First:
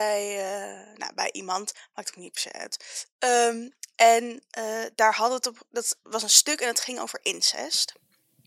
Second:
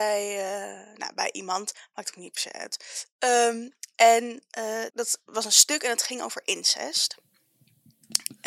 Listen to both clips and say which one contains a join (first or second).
second